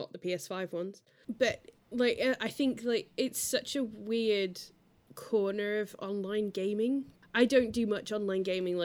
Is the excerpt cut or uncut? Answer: cut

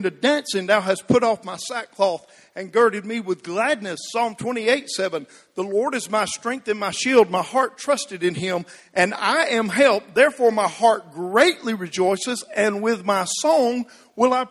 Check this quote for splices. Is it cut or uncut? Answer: uncut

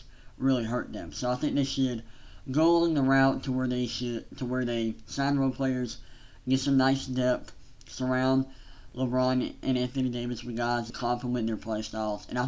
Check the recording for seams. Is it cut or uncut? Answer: cut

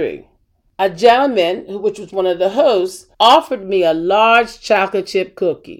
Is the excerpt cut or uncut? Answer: cut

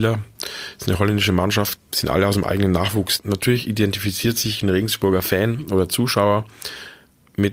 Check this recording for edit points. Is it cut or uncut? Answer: cut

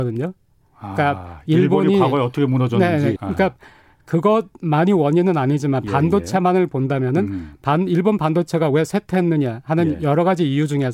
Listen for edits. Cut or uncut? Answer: cut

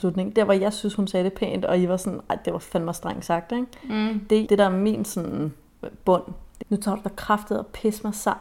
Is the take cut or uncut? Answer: cut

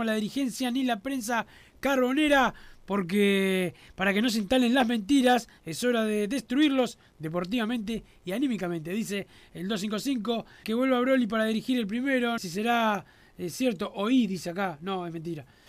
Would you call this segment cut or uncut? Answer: cut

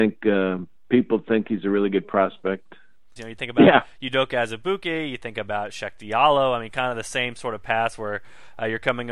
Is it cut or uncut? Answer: cut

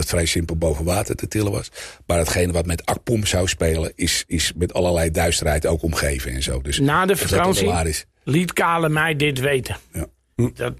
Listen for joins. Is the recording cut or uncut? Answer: uncut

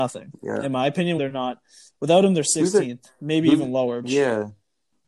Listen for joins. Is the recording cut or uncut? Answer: cut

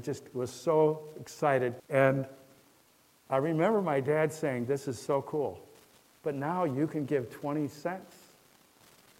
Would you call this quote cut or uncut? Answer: cut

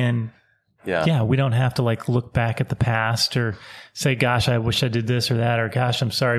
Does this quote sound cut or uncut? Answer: uncut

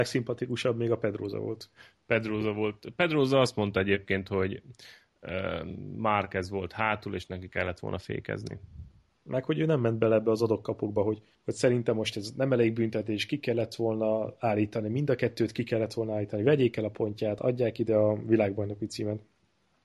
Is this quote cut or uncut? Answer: uncut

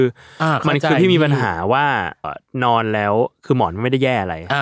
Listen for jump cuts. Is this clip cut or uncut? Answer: cut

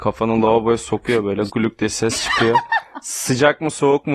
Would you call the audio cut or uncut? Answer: cut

